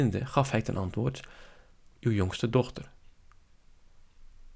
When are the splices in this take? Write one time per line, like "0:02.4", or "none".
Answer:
0:01.9